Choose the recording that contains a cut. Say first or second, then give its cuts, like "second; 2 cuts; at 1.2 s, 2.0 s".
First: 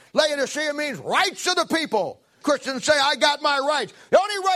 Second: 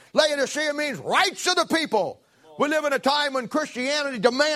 first; 1 cut; at 2.4 s